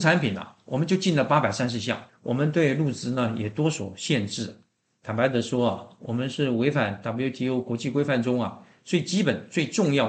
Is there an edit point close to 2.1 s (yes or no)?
yes